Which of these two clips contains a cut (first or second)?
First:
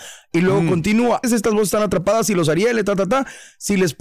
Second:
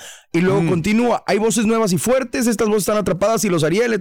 first